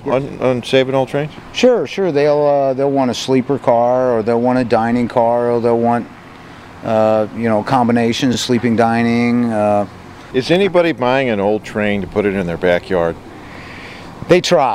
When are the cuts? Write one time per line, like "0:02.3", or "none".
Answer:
none